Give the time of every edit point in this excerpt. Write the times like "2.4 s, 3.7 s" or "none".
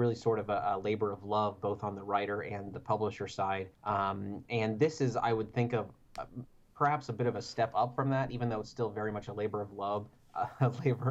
3.7 s